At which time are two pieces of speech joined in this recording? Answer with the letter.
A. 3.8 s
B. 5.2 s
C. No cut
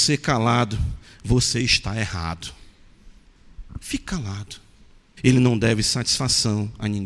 B